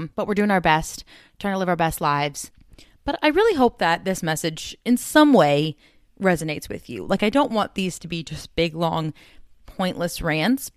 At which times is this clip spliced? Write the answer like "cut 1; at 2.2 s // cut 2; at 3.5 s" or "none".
none